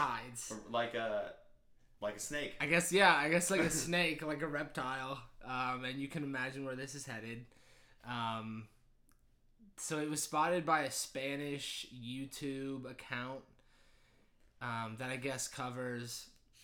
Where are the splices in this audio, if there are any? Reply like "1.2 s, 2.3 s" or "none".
none